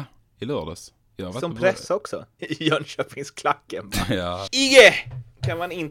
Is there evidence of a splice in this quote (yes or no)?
yes